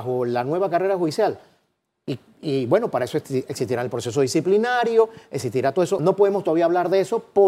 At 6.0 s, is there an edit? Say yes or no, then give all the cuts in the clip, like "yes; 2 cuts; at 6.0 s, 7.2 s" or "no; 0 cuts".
yes; 1 cut; at 6.0 s